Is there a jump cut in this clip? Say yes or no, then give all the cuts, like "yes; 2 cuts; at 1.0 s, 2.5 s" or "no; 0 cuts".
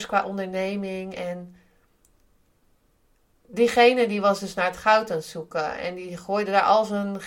no; 0 cuts